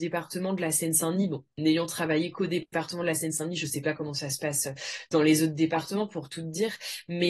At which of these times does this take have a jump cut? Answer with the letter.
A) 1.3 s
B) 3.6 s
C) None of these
C